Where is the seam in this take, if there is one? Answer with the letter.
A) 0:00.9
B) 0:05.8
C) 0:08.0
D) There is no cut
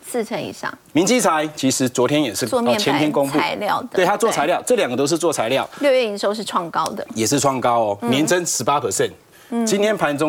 A